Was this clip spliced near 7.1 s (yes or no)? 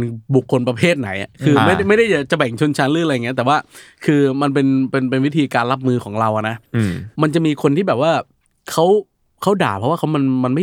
yes